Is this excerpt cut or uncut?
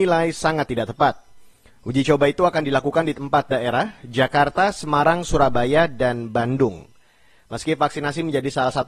uncut